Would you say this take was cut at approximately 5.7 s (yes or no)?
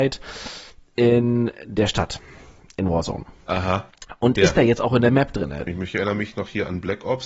yes